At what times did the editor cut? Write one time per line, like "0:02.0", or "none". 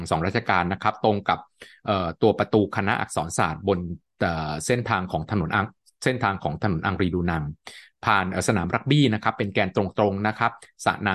none